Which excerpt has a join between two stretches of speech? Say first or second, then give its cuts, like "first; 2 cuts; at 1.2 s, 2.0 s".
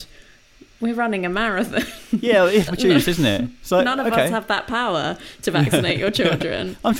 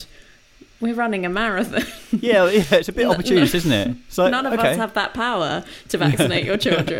first; 1 cut; at 2.7 s